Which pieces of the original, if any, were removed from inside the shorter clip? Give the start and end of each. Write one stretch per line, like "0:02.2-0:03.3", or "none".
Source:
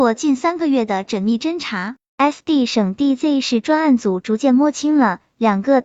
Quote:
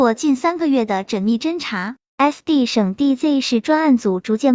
none